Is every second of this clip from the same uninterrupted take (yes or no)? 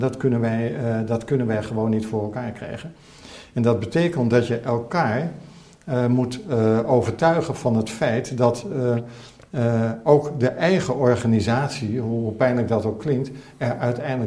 yes